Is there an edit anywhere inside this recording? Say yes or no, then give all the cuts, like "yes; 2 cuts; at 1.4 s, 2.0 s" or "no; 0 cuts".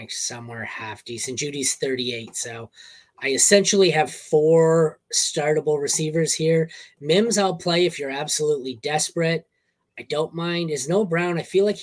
no; 0 cuts